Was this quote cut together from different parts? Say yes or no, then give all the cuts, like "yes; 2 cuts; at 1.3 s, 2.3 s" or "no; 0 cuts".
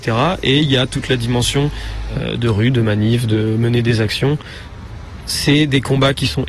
no; 0 cuts